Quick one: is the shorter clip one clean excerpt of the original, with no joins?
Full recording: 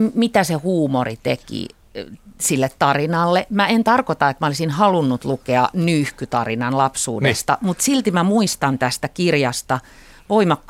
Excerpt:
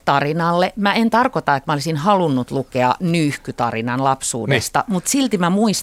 yes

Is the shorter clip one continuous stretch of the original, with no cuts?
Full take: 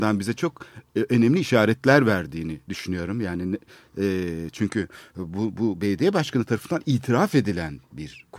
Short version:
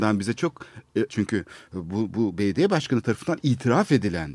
no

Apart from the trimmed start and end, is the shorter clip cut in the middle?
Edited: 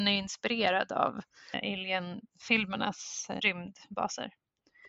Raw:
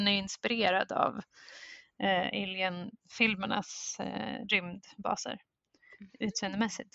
yes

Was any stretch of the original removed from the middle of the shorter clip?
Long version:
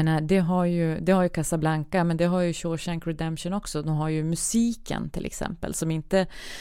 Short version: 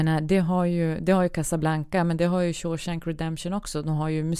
no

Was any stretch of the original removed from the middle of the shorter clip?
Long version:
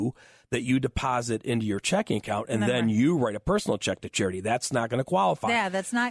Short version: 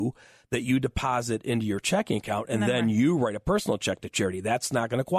no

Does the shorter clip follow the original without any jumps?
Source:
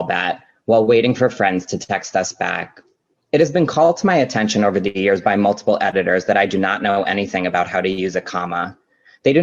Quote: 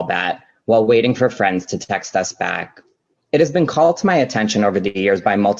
yes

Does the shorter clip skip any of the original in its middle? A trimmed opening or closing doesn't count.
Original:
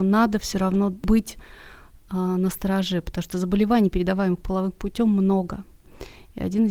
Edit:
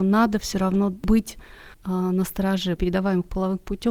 yes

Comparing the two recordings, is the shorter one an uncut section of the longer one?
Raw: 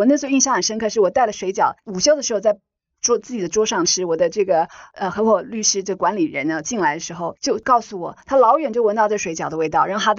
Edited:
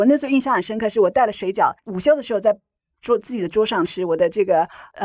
yes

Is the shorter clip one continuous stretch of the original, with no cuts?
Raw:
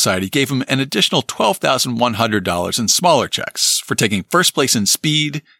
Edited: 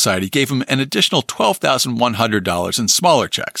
yes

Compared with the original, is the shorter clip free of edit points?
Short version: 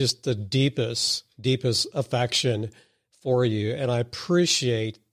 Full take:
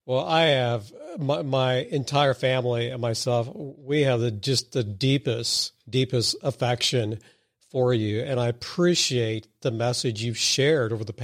yes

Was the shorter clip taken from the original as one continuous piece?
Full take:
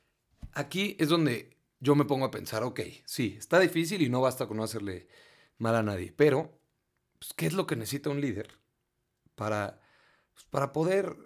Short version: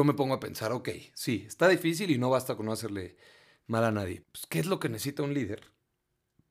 no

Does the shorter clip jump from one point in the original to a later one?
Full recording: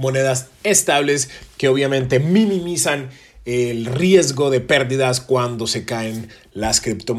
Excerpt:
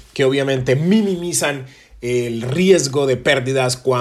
no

